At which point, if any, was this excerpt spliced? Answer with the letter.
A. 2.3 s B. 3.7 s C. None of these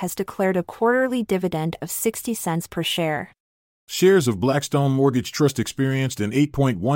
B